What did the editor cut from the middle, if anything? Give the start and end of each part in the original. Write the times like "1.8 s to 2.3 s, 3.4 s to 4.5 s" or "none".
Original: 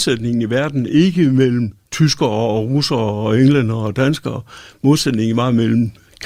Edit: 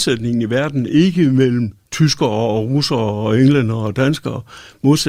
none

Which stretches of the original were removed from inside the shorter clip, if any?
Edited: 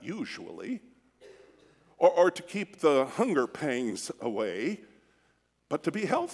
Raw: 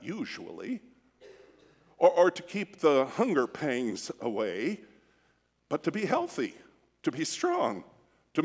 none

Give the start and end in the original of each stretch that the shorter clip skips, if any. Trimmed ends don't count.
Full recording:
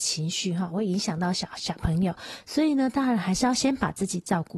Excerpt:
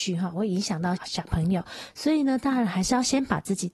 1.3 s to 1.5 s

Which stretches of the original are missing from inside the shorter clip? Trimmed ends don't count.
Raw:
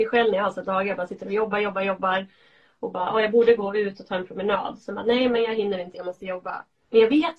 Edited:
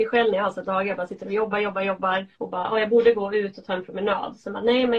2.3 s to 2.8 s

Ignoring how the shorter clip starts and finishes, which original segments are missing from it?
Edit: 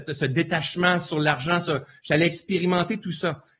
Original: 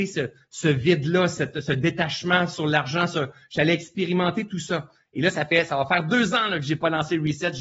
none

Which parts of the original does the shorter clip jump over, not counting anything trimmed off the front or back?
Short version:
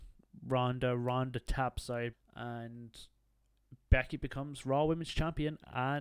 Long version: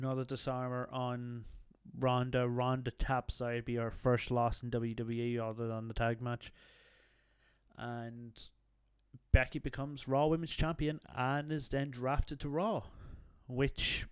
3.6 s to 7.5 s

